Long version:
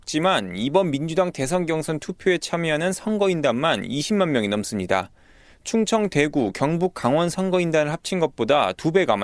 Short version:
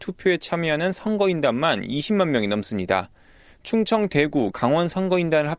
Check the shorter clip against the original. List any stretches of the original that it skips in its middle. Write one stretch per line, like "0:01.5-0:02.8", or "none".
0:06.5-0:06.9